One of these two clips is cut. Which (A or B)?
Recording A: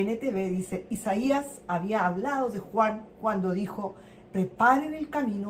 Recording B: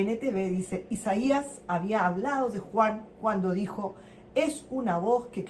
A